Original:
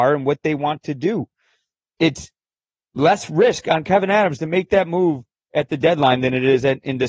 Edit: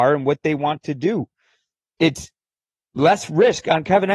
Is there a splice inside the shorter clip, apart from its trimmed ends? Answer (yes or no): no